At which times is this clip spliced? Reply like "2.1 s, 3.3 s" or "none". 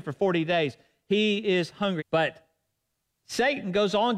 2.0 s